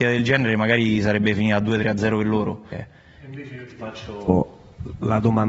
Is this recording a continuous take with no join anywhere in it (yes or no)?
no